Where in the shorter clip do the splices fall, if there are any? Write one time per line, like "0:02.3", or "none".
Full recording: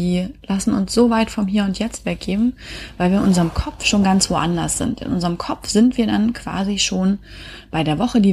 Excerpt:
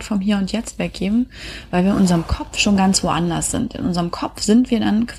none